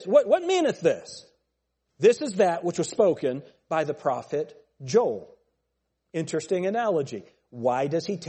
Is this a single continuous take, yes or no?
yes